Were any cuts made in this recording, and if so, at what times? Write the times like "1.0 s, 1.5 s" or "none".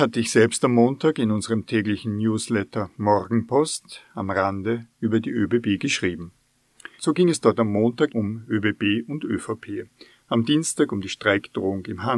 7.0 s, 8.1 s